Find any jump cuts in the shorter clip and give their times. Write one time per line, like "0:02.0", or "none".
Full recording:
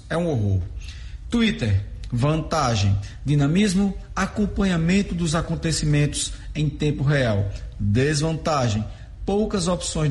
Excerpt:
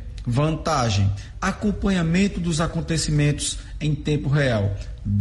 0:01.3